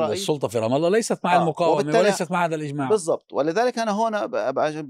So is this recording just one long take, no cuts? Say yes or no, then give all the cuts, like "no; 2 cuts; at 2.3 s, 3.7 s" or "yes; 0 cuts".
yes; 0 cuts